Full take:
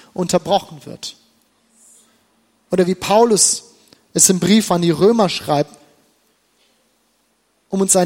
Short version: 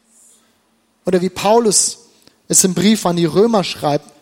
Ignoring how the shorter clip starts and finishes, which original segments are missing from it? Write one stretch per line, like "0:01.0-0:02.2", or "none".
none

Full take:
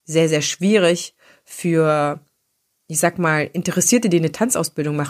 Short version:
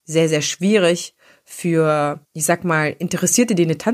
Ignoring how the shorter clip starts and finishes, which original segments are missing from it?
0:02.2-0:02.8

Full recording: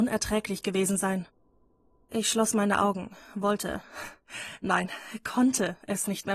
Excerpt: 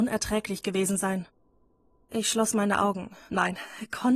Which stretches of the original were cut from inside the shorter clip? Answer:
0:03.3-0:04.6

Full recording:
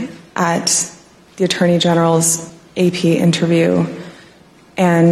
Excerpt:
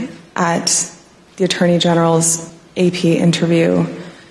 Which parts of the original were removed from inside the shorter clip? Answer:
none

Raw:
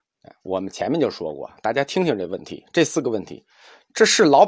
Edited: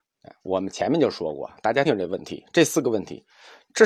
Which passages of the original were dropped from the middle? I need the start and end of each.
0:01.8-0:02.0

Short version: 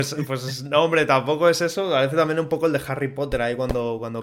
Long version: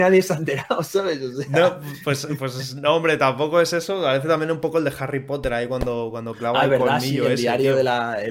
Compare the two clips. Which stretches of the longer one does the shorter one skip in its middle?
none

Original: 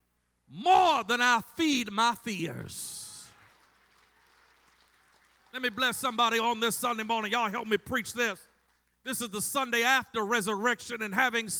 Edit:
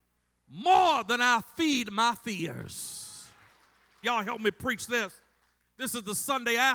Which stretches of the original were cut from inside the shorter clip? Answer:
0:04.0-0:07.3

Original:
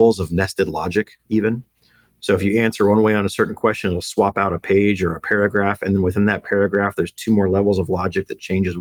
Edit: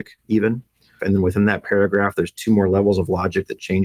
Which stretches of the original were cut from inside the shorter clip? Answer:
0:02.0-0:05.8

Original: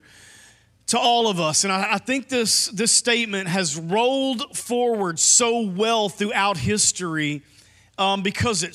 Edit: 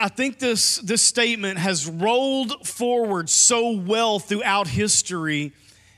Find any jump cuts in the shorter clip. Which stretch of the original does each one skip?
none

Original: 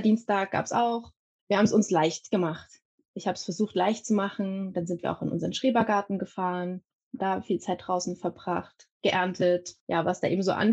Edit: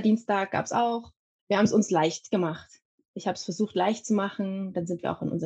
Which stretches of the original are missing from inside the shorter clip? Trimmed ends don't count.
none

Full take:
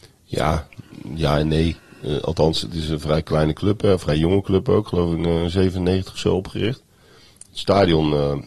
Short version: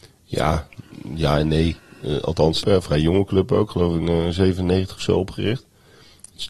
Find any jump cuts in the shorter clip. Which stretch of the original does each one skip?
0:02.6-0:03.8

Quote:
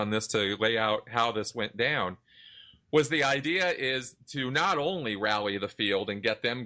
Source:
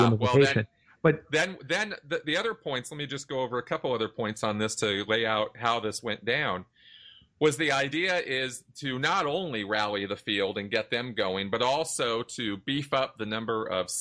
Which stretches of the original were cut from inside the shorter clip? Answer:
none

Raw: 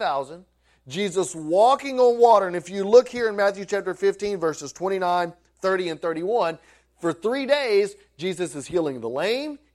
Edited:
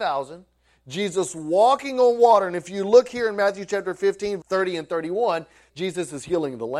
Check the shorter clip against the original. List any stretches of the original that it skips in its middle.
0:04.4-0:05.5
0:06.8-0:08.1

